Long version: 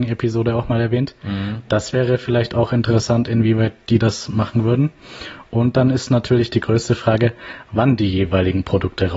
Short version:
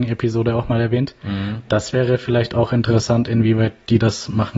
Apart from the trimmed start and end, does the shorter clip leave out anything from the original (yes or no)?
no